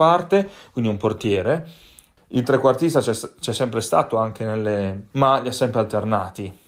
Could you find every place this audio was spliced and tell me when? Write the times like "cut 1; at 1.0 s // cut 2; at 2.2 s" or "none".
cut 1; at 2.2 s // cut 2; at 5.1 s